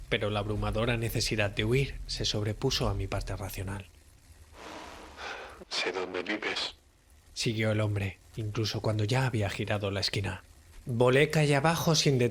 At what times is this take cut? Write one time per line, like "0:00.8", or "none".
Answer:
0:05.6

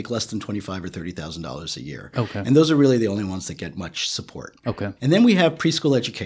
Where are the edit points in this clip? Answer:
0:05.0

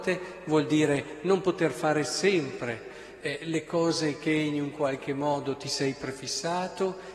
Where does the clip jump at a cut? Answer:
none

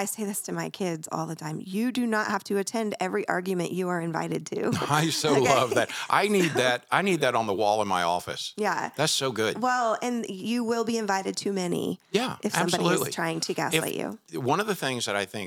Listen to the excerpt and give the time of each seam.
none

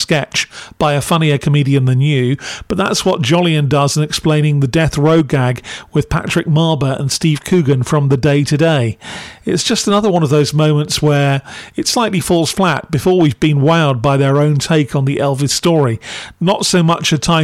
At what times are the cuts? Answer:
none

